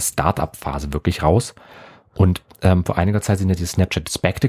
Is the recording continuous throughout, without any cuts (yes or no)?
yes